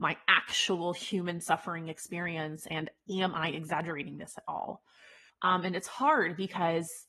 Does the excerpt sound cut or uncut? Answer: cut